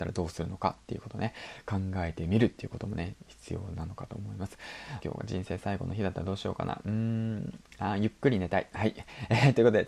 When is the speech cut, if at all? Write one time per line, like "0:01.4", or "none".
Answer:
0:05.0